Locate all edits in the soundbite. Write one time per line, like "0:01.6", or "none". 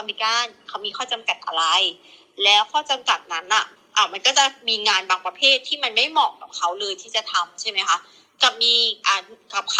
none